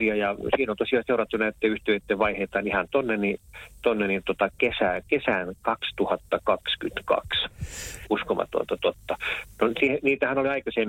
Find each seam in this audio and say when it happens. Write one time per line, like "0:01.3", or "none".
0:08.0